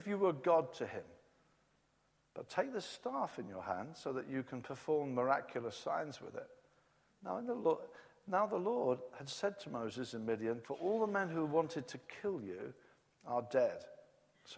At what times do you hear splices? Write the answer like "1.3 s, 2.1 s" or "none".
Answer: 7.1 s, 10.6 s